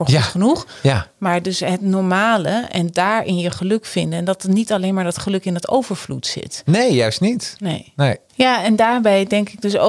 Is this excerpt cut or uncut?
cut